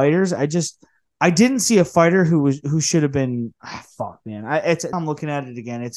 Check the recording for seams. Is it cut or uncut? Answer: cut